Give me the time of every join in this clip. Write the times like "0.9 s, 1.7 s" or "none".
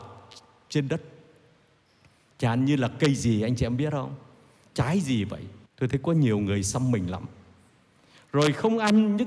5.7 s

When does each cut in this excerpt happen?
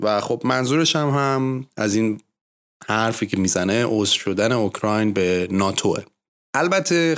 none

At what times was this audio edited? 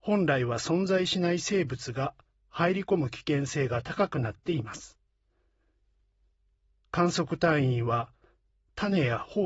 none

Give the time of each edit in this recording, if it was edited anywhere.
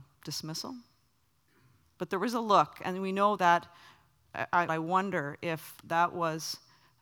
2.0 s, 3.4 s, 4.7 s

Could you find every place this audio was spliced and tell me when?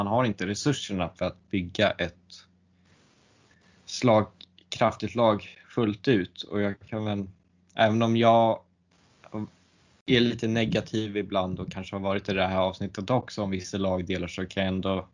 none

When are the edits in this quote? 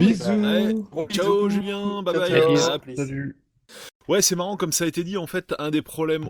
2.8 s

